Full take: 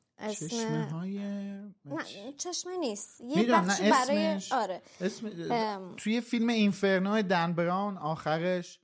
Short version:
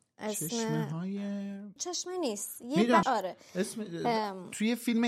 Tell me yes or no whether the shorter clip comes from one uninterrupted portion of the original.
no